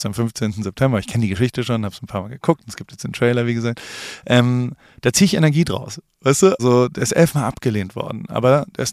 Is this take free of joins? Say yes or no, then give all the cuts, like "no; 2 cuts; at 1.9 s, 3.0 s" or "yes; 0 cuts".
no; 1 cut; at 6.6 s